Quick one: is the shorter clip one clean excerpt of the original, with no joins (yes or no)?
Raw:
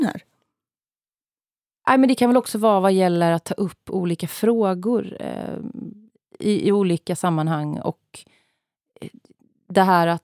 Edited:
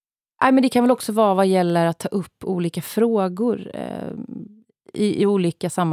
yes